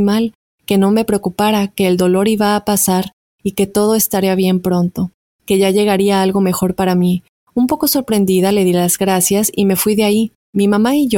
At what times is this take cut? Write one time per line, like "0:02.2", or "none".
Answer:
none